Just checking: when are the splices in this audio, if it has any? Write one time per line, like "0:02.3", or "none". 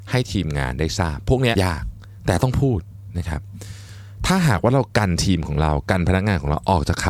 0:01.6